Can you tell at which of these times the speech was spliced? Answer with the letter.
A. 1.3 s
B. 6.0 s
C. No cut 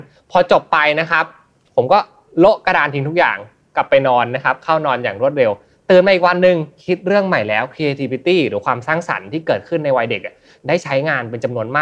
C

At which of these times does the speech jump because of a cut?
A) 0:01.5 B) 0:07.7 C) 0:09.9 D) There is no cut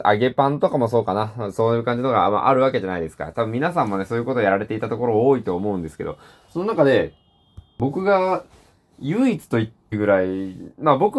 C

